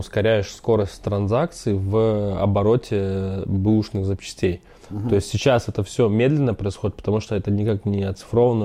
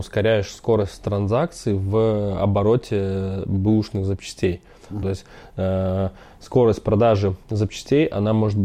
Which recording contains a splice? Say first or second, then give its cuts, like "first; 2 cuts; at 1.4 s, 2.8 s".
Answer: second; 1 cut; at 5.0 s